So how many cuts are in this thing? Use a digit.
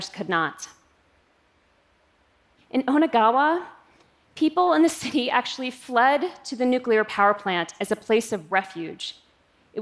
1